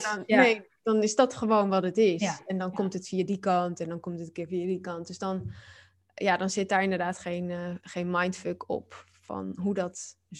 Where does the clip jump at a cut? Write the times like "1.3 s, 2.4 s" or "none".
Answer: none